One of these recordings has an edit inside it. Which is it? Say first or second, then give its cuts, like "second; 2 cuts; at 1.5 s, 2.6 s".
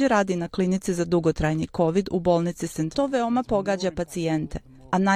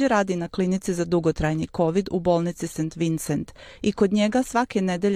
first; 1 cut; at 2.9 s